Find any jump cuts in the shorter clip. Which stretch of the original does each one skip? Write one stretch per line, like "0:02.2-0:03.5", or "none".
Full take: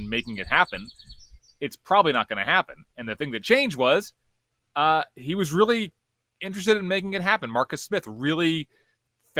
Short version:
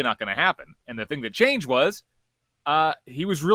none